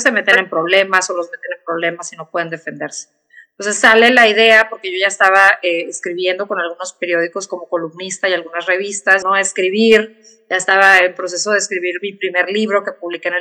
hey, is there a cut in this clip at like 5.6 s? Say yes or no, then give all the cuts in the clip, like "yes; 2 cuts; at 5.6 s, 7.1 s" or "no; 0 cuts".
no; 1 cut; at 9.2 s